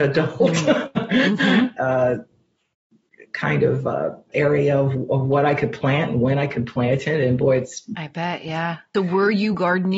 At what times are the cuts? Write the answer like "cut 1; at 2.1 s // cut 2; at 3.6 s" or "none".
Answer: cut 1; at 1.8 s // cut 2; at 8.9 s